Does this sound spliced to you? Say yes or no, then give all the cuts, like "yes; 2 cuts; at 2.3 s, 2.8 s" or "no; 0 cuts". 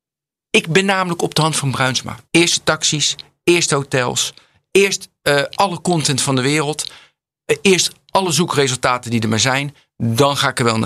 yes; 1 cut; at 2.3 s